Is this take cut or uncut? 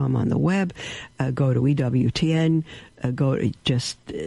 uncut